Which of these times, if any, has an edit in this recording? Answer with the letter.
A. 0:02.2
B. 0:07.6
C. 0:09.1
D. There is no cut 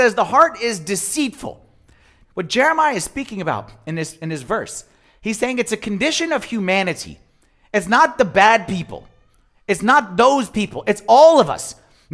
A